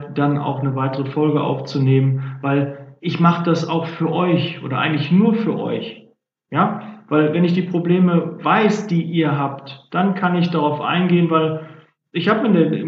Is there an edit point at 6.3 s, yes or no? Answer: no